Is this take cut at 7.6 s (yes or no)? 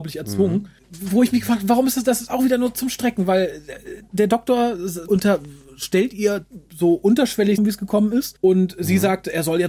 yes